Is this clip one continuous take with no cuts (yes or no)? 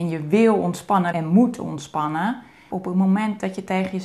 no